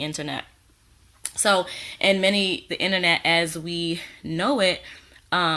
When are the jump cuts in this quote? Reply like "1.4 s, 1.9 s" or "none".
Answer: 2.7 s